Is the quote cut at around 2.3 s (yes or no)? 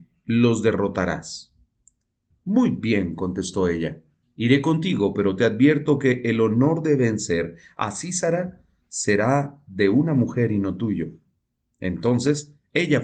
yes